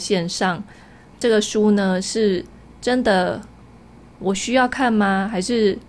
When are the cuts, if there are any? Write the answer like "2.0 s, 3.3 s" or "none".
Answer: 1.1 s